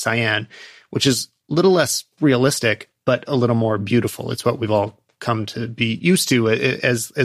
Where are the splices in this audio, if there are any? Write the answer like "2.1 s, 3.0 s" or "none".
none